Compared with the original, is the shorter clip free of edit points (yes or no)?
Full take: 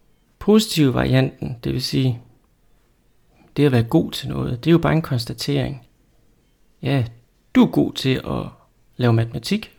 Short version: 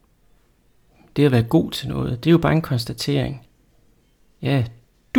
yes